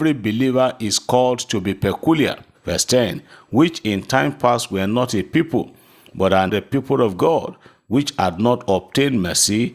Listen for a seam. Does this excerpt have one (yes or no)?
yes